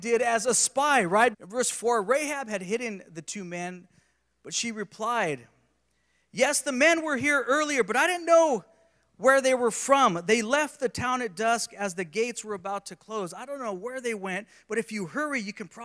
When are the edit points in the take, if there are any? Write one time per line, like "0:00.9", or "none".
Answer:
0:01.3